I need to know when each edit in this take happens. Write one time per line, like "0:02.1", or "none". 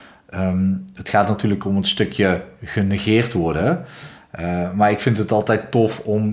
none

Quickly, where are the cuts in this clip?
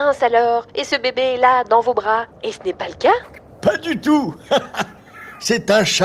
0:02.3

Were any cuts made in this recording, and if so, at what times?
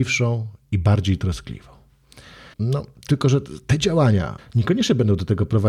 0:02.5
0:04.4

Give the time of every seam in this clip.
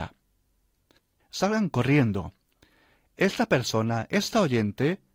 0:01.2

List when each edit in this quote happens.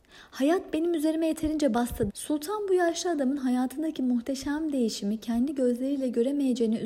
0:02.1

